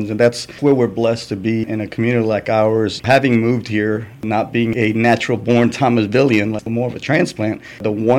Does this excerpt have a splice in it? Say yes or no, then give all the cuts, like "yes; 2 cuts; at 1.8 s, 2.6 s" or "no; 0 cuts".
no; 0 cuts